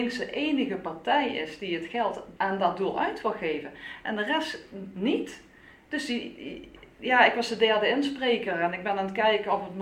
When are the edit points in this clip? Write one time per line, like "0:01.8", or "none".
0:02.4